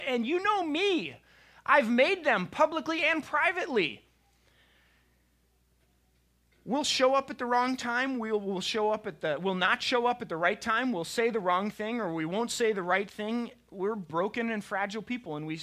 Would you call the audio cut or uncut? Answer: uncut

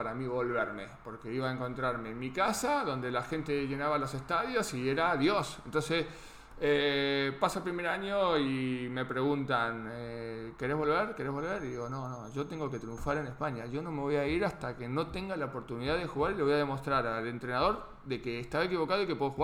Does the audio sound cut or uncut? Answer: uncut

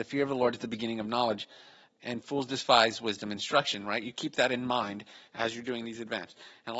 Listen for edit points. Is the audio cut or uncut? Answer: uncut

